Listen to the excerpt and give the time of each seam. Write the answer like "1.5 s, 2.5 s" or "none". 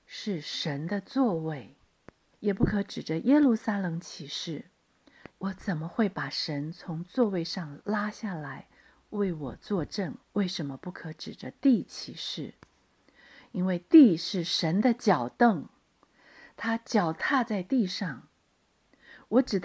2.3 s, 5.3 s, 10.2 s